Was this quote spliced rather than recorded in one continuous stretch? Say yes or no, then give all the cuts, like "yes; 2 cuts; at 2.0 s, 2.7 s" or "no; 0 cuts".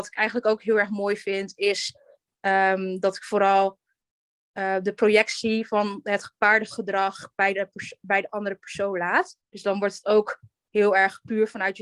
yes; 1 cut; at 9.4 s